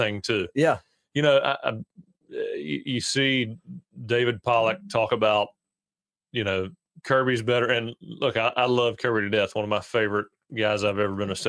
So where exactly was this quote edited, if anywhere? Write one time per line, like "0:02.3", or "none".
none